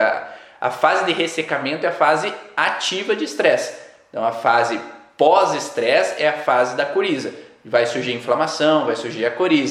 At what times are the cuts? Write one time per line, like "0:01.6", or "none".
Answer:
none